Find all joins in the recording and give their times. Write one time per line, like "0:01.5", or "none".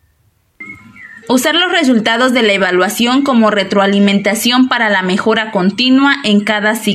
0:01.2